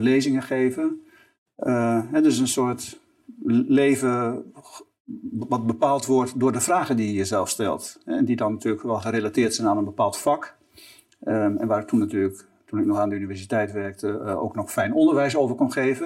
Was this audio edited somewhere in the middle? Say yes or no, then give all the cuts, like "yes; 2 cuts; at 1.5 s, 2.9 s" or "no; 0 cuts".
no; 0 cuts